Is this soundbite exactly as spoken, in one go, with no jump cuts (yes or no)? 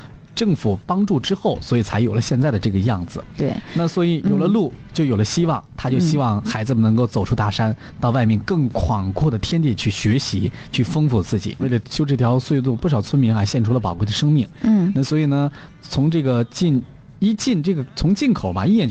no